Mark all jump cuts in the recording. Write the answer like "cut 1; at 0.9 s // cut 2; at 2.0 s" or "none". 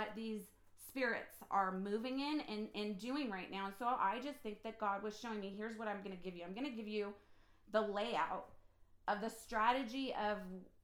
none